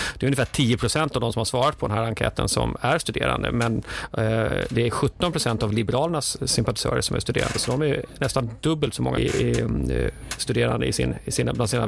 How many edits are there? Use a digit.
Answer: 1